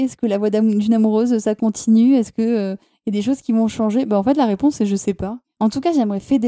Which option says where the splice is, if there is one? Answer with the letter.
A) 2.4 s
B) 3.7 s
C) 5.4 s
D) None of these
C